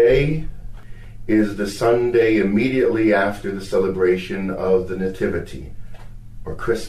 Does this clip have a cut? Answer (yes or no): no